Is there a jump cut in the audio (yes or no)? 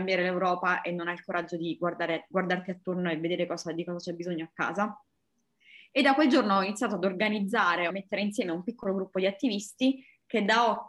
yes